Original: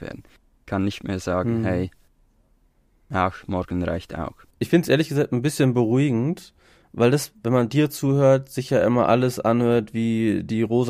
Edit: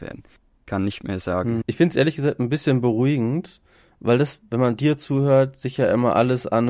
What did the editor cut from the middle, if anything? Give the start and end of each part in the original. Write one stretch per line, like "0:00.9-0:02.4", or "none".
0:01.6-0:04.5